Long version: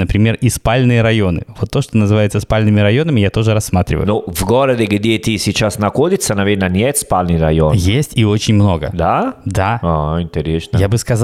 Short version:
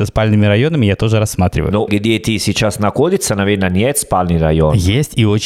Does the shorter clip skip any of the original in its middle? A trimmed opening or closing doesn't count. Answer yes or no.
yes